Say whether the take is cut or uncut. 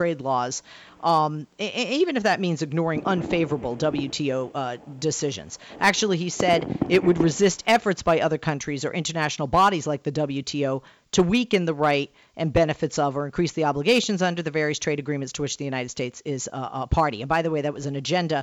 uncut